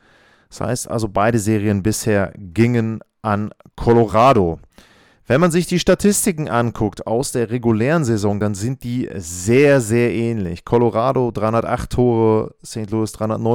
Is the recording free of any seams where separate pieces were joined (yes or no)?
yes